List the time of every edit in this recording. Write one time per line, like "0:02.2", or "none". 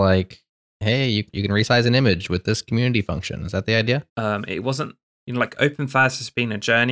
0:04.1